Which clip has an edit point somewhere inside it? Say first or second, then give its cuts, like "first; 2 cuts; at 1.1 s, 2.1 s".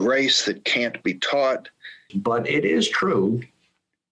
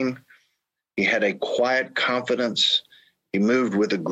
first; 1 cut; at 2.1 s